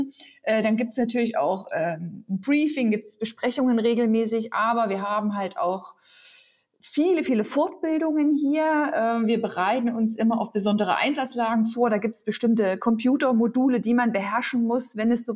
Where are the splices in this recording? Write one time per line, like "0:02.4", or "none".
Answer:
none